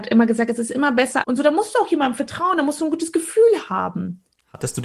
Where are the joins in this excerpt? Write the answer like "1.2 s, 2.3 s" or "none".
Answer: 1.2 s